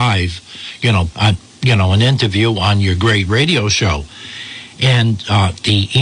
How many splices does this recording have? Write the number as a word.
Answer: one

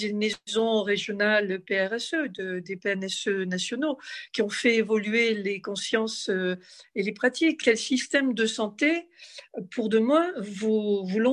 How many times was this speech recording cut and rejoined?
one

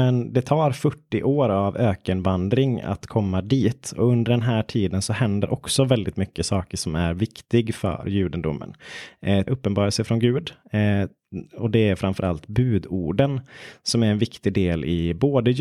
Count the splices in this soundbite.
one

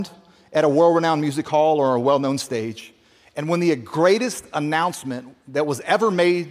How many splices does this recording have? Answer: zero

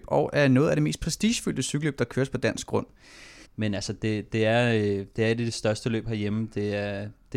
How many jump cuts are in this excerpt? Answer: one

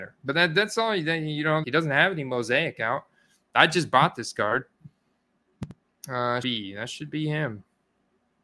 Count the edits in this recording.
two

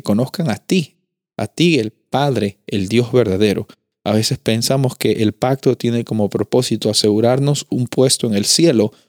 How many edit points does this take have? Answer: zero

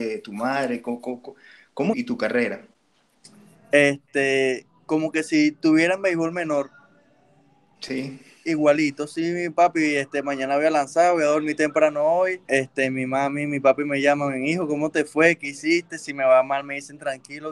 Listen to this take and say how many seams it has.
two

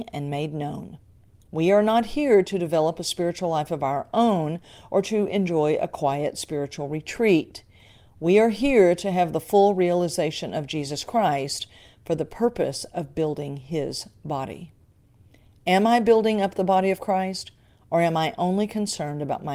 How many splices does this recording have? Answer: zero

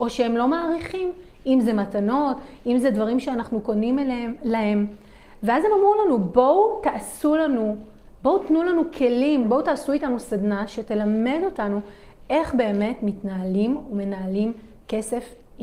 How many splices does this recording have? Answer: one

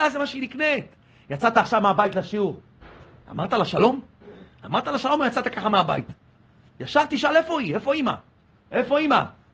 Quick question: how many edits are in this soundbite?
zero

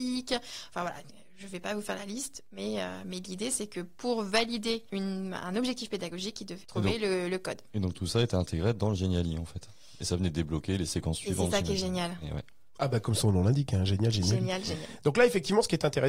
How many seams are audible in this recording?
zero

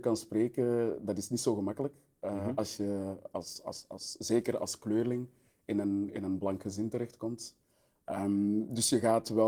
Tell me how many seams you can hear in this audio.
zero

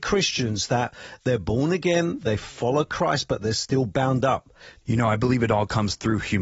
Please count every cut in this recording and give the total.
one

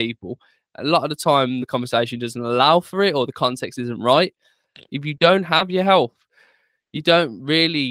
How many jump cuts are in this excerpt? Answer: two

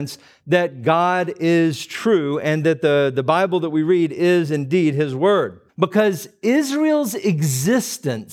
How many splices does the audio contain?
one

